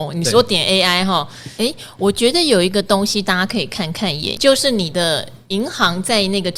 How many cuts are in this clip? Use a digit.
2